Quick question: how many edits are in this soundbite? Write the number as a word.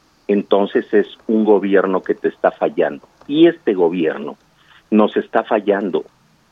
zero